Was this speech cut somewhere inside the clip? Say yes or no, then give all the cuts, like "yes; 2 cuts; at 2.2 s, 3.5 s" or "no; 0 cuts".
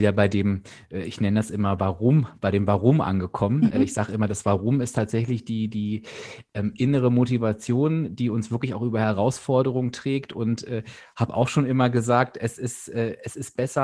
no; 0 cuts